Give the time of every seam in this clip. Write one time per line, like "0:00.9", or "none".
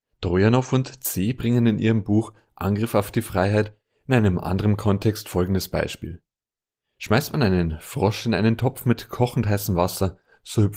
none